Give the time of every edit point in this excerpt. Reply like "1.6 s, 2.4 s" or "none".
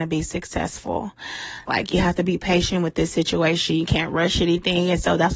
1.7 s